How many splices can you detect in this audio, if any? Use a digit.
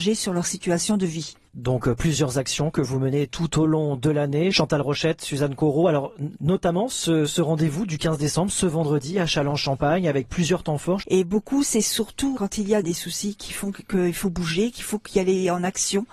2